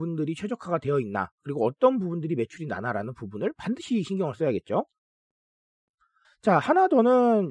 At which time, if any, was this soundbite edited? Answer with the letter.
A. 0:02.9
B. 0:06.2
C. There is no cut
B